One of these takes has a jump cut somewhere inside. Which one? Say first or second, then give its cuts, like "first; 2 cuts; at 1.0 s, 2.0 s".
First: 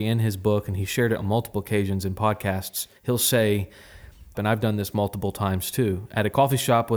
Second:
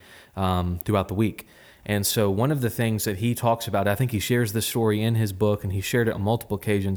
first; 2 cuts; at 3.0 s, 4.3 s